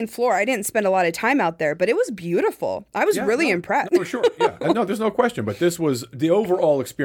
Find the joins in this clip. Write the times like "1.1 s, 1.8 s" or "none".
3.9 s